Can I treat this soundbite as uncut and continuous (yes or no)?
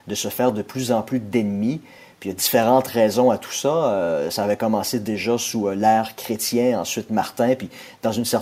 yes